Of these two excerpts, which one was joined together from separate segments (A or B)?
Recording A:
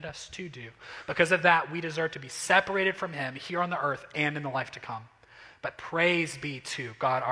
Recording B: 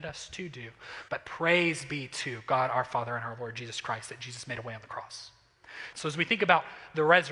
B